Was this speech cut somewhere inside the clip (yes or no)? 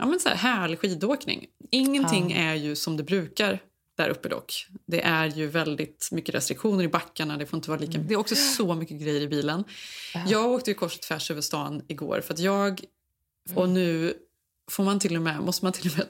yes